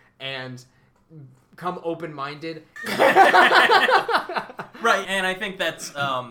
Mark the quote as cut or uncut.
cut